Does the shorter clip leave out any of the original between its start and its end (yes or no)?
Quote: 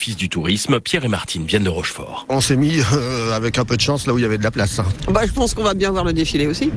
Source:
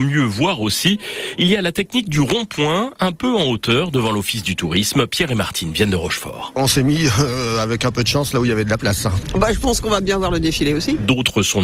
no